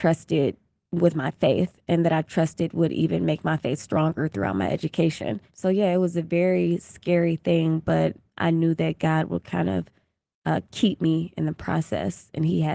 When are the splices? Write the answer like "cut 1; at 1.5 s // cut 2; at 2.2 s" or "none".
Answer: none